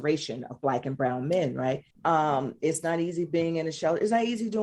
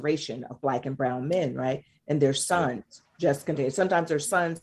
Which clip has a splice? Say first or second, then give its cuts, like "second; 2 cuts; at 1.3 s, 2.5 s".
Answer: first; 1 cut; at 1.9 s